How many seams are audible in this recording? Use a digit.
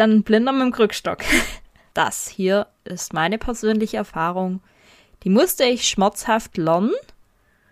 1